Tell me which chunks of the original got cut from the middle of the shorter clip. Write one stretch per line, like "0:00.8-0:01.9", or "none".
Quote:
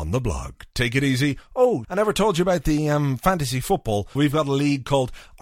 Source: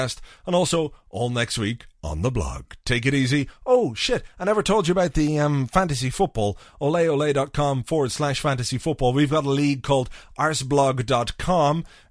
0:03.9-0:04.3
0:06.6-0:09.1